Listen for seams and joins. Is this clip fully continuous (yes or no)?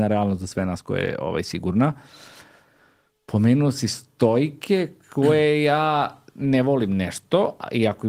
yes